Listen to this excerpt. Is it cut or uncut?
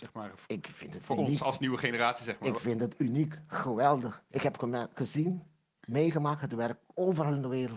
uncut